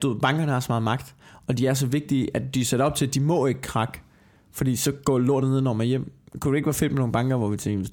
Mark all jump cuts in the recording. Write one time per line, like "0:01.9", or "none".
none